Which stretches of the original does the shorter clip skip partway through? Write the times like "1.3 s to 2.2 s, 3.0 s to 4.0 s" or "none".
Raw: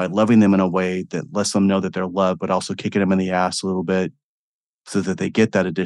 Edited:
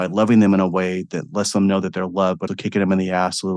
2.5 s to 2.7 s